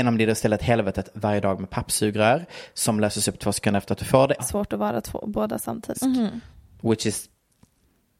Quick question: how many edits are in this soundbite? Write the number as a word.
two